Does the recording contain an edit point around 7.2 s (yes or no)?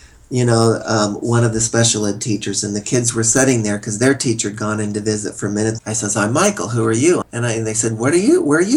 yes